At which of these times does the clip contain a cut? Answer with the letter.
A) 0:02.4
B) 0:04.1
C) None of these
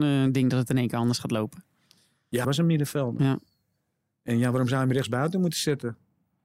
A